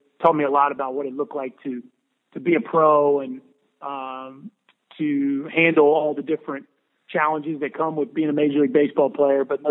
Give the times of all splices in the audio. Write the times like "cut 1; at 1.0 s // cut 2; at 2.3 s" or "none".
none